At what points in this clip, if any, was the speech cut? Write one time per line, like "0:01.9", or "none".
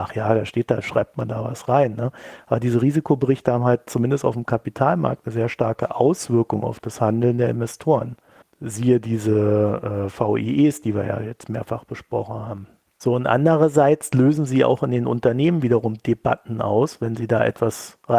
none